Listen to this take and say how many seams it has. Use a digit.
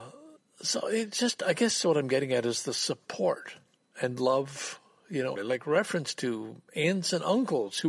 1